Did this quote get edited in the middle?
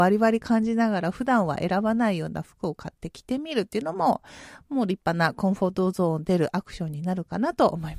no; 0 cuts

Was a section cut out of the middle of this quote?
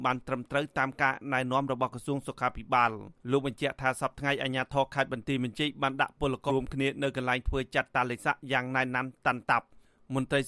yes; 2 cuts; at 3.2 s, 6.5 s

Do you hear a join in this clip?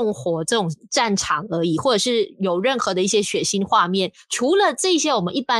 no; 0 cuts

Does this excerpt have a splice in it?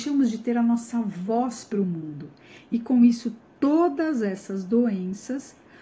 no; 0 cuts

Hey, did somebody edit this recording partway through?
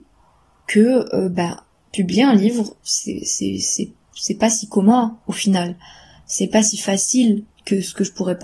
no; 0 cuts

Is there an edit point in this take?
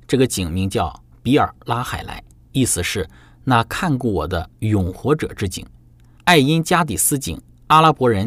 yes; 2 cuts; at 2.5 s, 6.2 s

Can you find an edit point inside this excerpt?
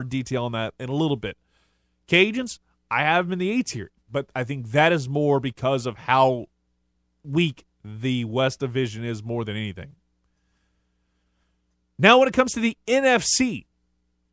no; 0 cuts

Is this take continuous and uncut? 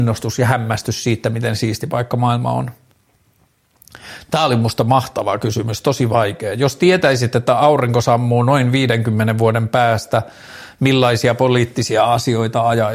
yes; 0 cuts

